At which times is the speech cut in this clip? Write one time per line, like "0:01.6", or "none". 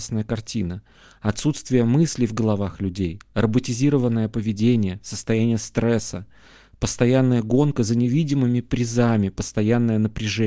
none